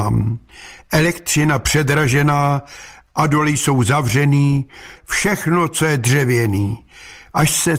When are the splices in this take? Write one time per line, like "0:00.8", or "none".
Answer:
0:05.0